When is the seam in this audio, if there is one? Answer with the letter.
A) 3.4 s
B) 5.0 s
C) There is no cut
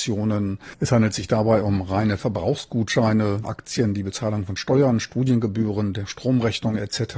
A